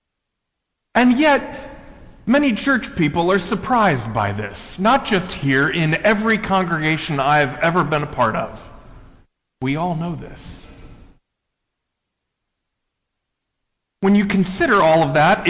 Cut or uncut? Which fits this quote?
cut